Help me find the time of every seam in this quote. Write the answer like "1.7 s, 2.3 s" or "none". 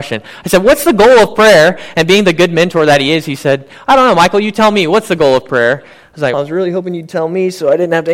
6.3 s